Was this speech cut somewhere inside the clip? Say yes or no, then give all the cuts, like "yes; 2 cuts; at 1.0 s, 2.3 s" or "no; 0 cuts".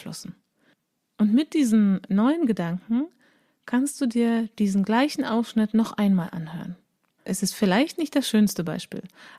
yes; 1 cut; at 7.2 s